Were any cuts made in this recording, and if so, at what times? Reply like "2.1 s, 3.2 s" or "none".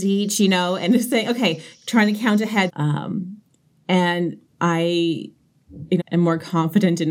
2.7 s, 6.0 s